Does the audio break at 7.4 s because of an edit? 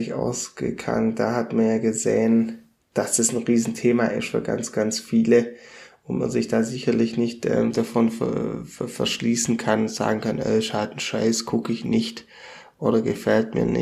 no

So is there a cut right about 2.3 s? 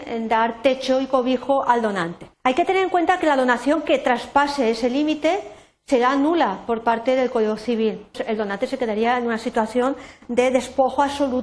yes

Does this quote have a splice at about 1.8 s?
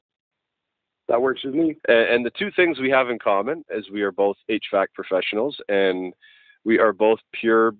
yes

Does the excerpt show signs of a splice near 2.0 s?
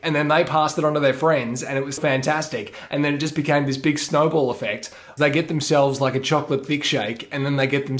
yes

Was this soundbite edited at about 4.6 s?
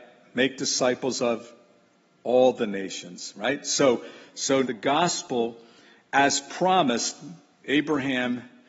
yes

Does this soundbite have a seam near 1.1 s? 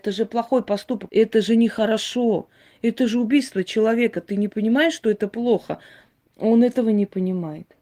yes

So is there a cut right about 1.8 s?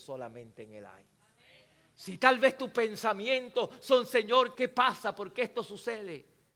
no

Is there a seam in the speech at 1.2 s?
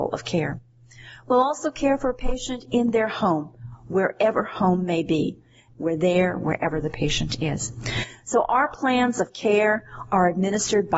no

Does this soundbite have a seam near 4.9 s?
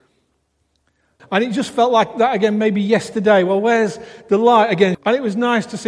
yes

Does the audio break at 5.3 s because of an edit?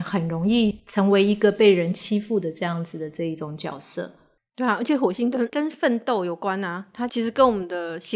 no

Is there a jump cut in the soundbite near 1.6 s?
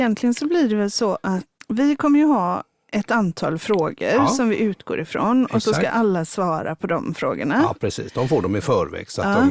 yes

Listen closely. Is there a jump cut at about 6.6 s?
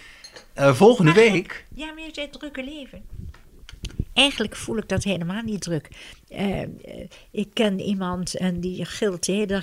no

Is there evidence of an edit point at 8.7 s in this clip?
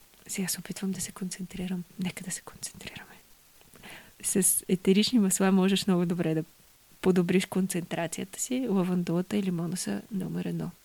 no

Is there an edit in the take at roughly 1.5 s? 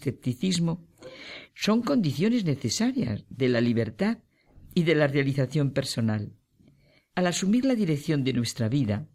yes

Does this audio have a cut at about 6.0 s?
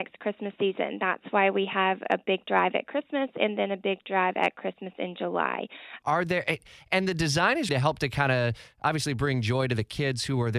yes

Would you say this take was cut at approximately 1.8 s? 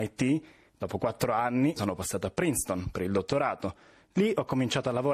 yes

